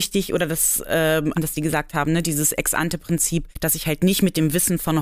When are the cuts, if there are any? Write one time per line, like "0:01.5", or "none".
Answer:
0:01.3
0:03.5

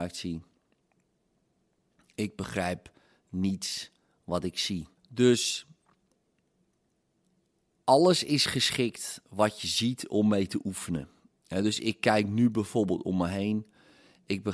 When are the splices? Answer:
0:05.0

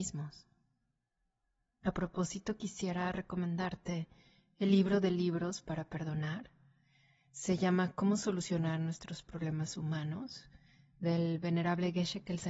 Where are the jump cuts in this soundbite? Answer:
0:01.8

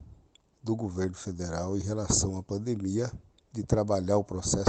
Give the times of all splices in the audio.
none

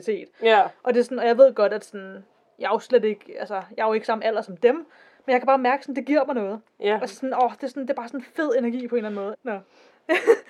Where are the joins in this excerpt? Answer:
0:09.3

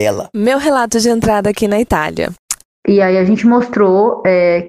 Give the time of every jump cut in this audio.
0:02.7

